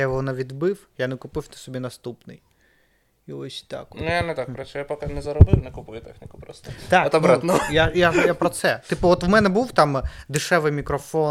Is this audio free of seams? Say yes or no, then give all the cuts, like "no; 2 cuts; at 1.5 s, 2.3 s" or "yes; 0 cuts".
yes; 0 cuts